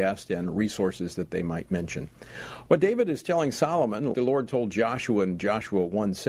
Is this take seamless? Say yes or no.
no